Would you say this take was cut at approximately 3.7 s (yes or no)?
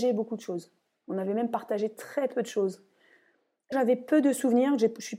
yes